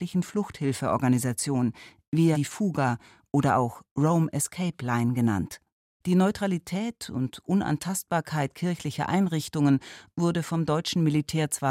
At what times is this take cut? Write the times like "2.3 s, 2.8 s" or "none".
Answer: 2.3 s, 6.0 s